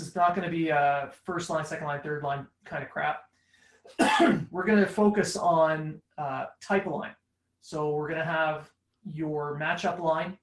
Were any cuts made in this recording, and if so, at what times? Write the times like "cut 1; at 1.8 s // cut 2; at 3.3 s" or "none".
none